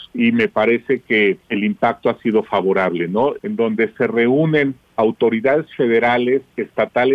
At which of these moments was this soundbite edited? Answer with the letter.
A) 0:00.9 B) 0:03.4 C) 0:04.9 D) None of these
B